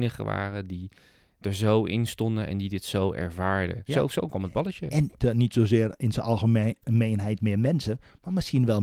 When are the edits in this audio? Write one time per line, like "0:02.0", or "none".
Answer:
0:03.9
0:05.2